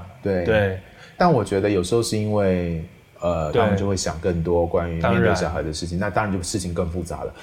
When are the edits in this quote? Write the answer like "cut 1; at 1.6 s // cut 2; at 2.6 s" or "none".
cut 1; at 1.2 s // cut 2; at 3.5 s